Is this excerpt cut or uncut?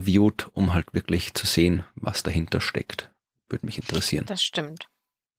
uncut